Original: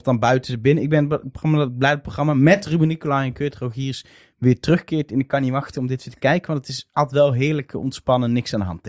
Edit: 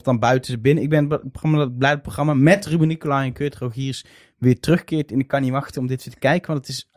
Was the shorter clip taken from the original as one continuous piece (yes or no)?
yes